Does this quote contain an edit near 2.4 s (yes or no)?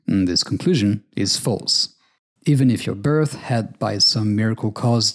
yes